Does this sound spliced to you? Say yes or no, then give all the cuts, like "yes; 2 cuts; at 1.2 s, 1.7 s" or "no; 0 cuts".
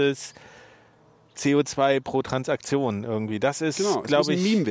no; 0 cuts